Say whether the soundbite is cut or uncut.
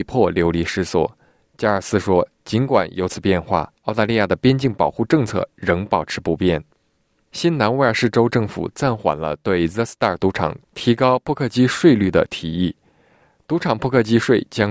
uncut